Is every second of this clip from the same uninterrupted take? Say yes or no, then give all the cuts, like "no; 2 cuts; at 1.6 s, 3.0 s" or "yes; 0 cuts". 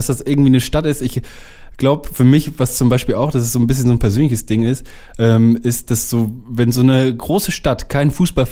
yes; 0 cuts